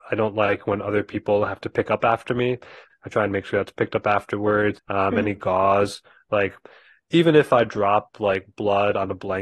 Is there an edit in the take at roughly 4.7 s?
yes; 2 cuts; at 2.9 s, 4.7 s

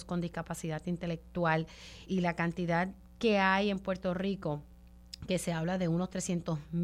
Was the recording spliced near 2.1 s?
yes; 1 cut; at 2.1 s

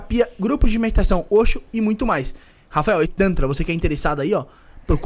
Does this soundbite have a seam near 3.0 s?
yes; 1 cut; at 3.0 s

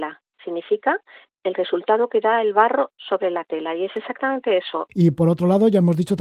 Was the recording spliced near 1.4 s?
no; 1 cut; at 4.9 s

